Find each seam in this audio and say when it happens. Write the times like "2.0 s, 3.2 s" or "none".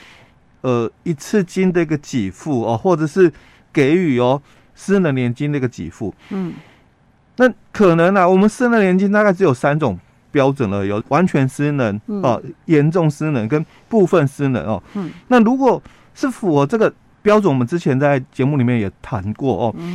11.0 s